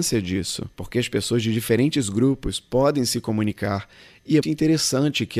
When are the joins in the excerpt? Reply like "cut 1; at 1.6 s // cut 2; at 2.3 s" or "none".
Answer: cut 1; at 4.4 s